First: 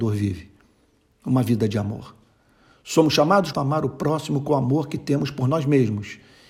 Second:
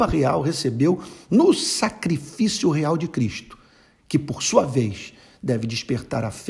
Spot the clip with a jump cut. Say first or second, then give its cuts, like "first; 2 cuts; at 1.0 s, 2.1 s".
first; 1 cut; at 3.5 s